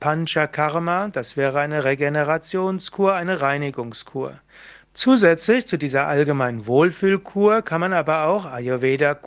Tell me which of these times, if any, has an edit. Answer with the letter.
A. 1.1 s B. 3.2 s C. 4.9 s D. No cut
C